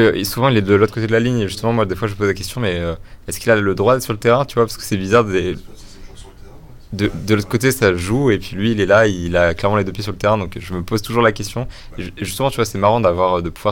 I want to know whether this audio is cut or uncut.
uncut